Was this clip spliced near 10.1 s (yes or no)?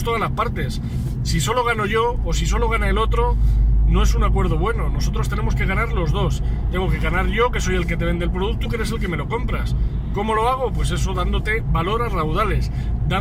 no